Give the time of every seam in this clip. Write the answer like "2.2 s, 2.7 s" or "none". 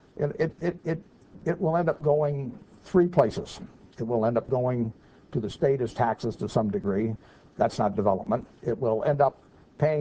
none